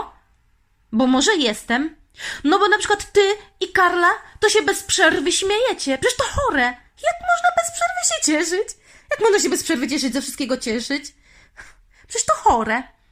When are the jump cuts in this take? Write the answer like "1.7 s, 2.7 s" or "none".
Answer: none